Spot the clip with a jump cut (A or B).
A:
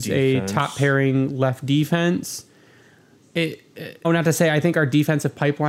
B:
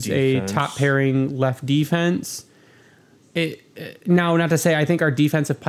A